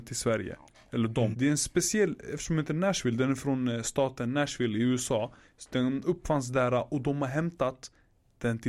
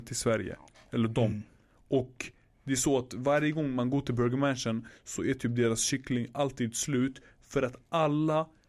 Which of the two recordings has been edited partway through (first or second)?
first